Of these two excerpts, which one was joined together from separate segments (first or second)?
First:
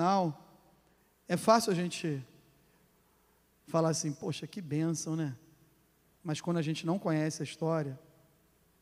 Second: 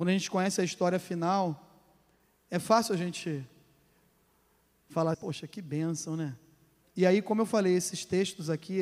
second